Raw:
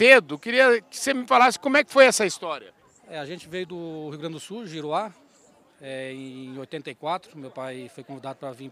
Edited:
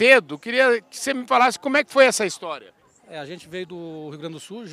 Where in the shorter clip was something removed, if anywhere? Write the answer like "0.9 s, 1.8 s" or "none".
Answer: none